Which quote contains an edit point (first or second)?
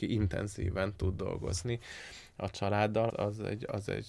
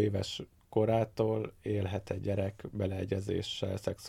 first